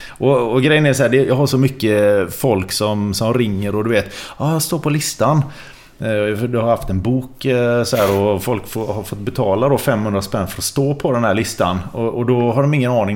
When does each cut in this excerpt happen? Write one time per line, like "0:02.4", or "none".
none